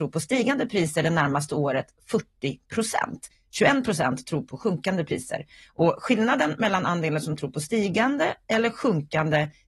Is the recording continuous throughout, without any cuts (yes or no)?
yes